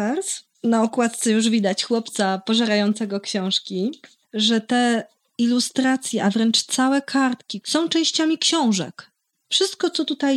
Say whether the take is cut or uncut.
cut